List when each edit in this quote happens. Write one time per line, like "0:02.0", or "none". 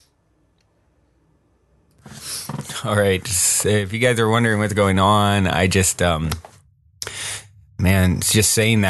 none